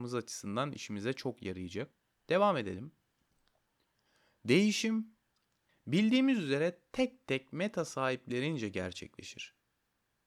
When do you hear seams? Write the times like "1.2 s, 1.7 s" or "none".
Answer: none